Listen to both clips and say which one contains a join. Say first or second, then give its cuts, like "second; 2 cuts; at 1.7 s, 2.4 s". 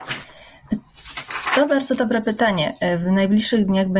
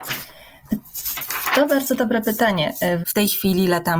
second; 1 cut; at 3.0 s